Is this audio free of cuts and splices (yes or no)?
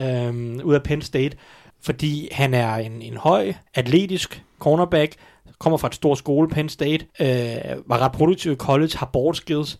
no